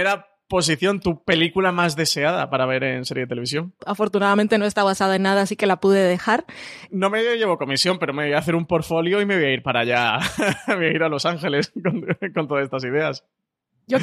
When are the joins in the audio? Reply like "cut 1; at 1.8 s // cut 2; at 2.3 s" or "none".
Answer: cut 1; at 3.8 s // cut 2; at 6.9 s